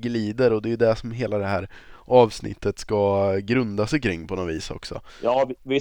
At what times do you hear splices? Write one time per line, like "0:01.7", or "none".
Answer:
none